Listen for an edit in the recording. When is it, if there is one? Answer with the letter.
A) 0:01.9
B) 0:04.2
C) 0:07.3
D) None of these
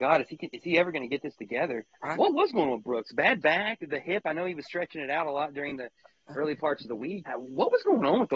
C